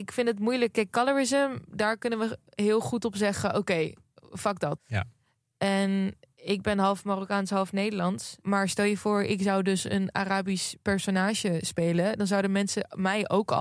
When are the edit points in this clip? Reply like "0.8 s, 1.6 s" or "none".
4.8 s, 8.4 s